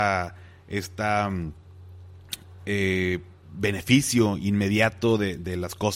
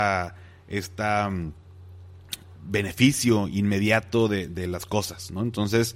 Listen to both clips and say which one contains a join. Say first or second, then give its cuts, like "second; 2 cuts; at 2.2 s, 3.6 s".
second; 1 cut; at 2.6 s